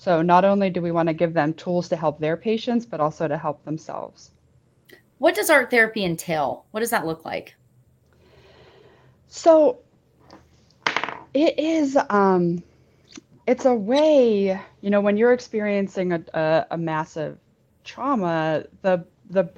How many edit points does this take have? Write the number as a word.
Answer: zero